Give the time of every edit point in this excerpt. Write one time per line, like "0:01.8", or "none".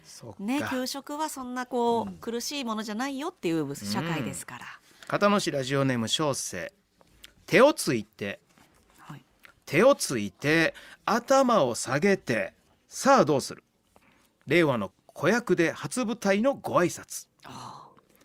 0:14.9